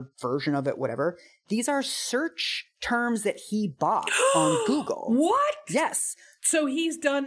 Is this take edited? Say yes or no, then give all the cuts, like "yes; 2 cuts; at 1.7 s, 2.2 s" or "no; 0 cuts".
no; 0 cuts